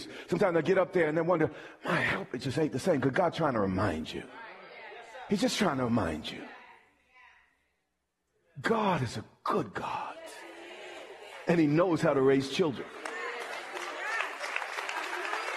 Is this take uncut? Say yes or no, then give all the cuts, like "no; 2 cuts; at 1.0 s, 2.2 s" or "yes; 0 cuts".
yes; 0 cuts